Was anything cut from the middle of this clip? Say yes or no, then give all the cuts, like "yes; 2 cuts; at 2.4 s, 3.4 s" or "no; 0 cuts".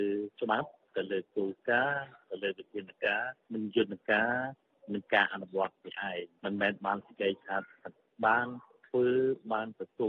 no; 0 cuts